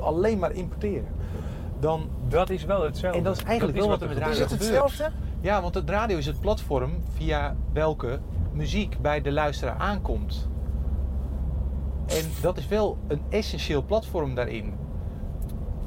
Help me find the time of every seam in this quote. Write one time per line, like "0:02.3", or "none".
none

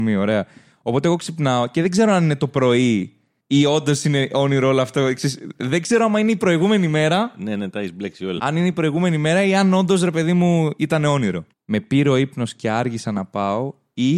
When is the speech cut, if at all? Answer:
0:08.4
0:11.5

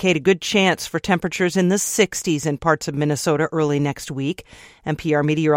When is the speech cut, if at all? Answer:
none

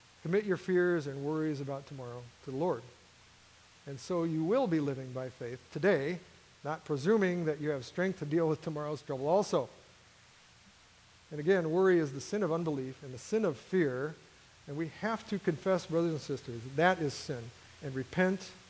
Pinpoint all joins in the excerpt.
none

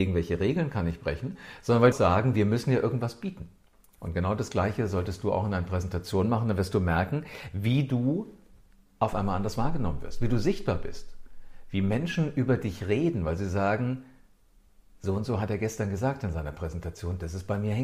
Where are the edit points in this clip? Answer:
0:01.9
0:03.9

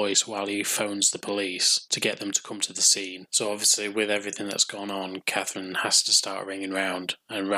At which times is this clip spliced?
none

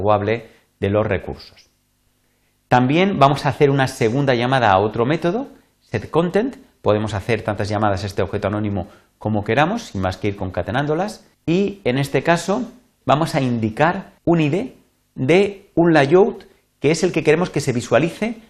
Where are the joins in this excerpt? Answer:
0:11.3
0:13.0
0:14.2

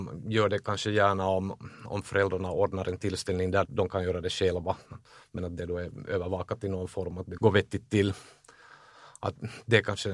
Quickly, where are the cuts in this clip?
0:03.6
0:07.4

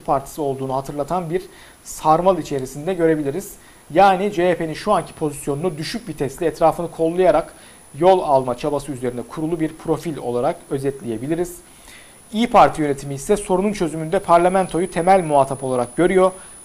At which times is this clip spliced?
none

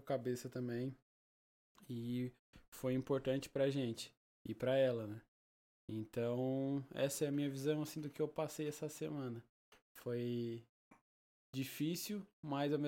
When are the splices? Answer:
none

